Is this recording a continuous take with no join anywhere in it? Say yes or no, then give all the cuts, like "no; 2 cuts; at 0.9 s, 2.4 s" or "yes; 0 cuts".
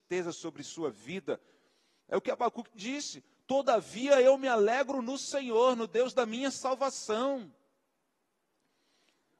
no; 1 cut; at 2.0 s